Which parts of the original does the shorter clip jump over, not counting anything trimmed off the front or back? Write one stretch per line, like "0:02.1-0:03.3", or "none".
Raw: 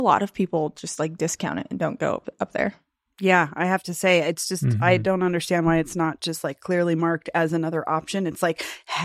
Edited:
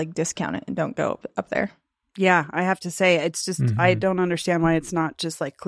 none

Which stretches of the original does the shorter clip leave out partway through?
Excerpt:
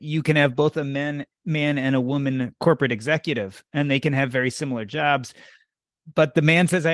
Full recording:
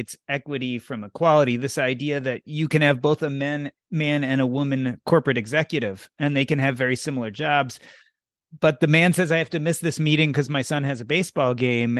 none

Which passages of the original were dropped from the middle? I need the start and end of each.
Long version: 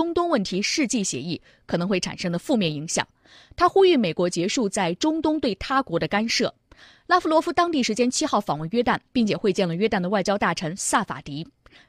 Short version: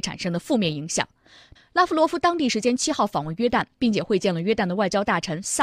0:03.5-0:06.9

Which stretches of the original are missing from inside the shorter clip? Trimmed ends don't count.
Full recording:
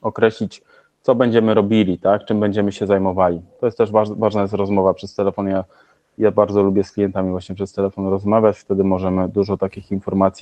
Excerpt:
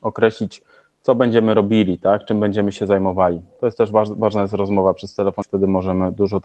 0:05.4-0:08.6

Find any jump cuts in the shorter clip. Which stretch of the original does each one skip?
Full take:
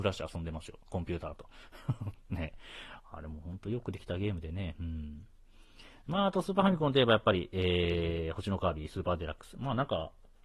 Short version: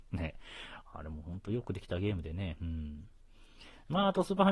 none

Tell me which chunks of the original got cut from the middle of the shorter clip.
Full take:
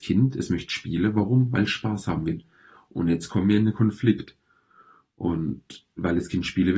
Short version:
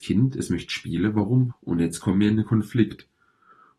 0:01.5-0:02.8

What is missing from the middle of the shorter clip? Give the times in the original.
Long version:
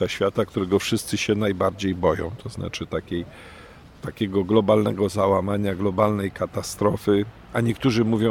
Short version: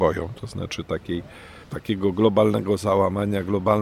0:03.7-0:04.0

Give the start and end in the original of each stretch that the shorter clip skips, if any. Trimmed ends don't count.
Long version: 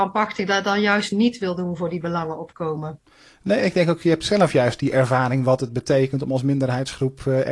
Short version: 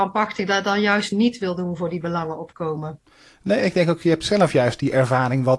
none

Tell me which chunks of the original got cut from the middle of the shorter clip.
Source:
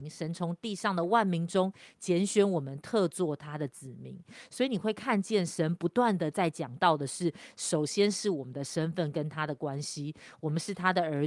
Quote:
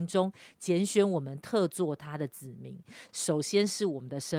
0:04.5-0:07.5

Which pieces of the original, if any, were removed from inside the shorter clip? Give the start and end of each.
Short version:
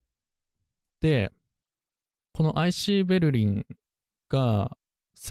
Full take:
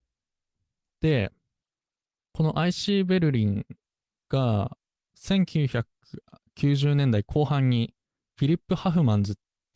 none

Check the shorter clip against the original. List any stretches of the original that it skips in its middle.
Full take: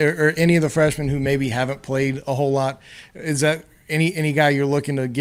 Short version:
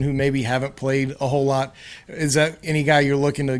0:03.7-0:04.1

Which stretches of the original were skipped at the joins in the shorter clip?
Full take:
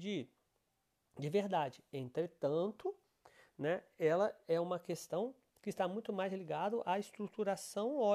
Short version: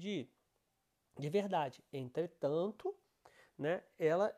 none

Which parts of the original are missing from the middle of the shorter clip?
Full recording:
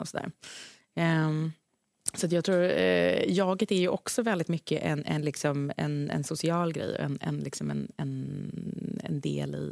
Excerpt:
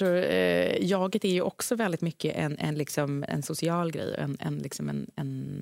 0:05.8-0:06.1

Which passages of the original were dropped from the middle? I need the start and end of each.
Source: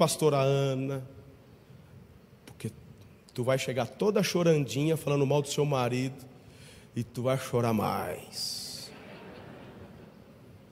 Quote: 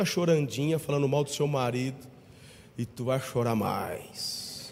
none

